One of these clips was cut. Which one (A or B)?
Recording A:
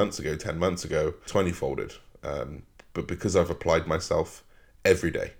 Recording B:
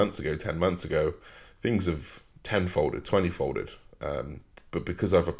A